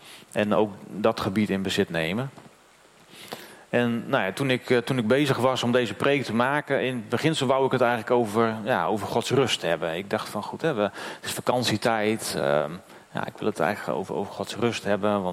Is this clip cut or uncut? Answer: uncut